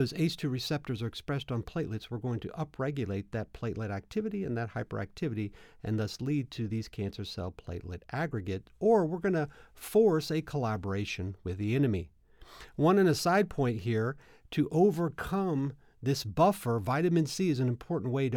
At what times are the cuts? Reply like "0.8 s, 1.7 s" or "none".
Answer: none